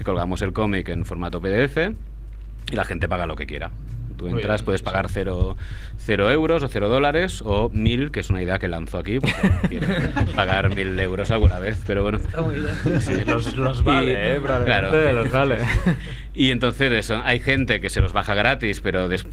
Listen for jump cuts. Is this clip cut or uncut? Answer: uncut